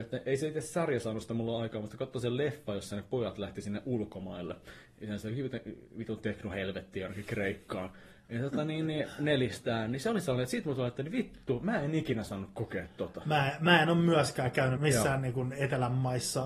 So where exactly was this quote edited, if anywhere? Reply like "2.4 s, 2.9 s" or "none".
14.8 s